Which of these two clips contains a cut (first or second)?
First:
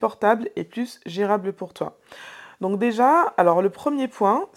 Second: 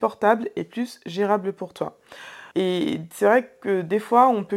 second